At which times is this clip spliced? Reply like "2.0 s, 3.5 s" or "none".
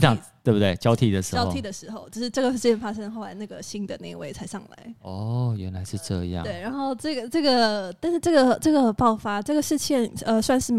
none